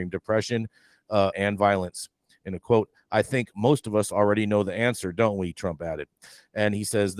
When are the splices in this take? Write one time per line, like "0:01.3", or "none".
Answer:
0:01.3

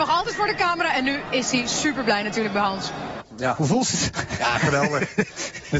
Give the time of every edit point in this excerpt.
0:03.2

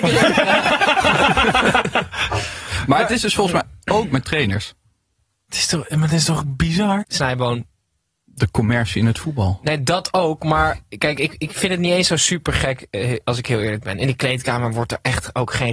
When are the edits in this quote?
0:07.0

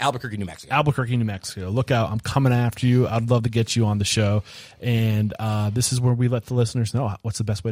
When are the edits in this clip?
none

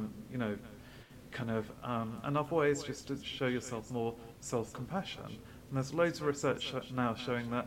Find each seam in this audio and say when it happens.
0:01.7

